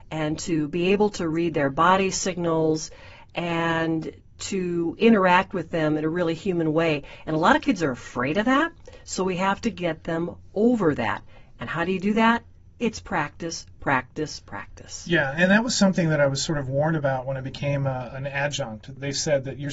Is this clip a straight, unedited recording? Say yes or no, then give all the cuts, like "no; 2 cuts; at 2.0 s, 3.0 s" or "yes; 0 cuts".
yes; 0 cuts